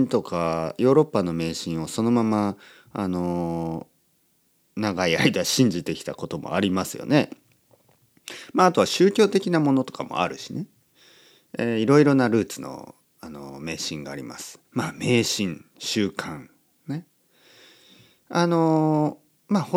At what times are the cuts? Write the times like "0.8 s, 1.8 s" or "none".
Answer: none

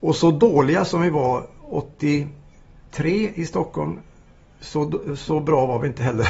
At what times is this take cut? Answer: none

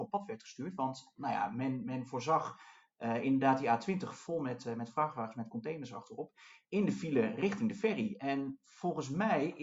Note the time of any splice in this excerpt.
none

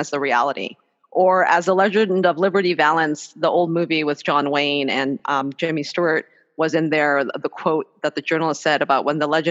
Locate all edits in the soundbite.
none

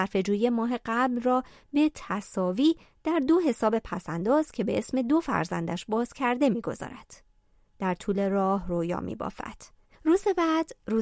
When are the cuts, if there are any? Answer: 9.9 s

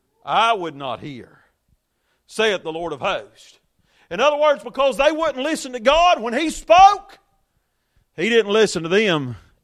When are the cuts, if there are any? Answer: none

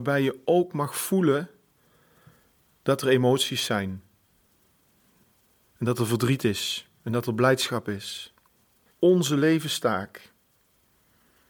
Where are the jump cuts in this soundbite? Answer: 8.9 s

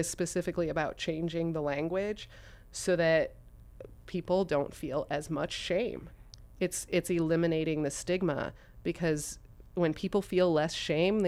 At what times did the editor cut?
none

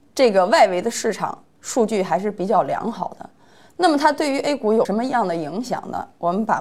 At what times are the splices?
none

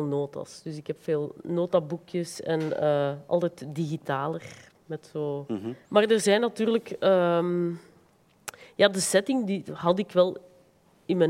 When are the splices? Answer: 5.8 s

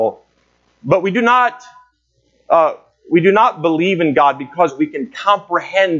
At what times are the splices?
none

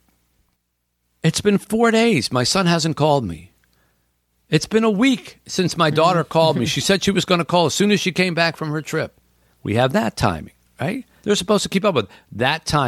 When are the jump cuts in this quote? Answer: 11.2 s

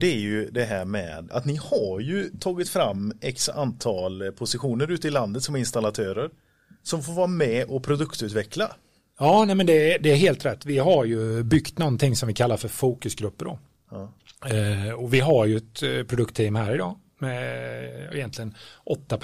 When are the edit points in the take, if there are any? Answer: 1.3 s

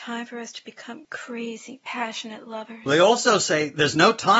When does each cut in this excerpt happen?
none

